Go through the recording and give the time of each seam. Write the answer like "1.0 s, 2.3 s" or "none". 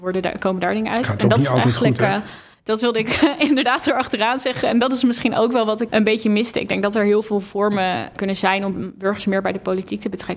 5.9 s, 8.1 s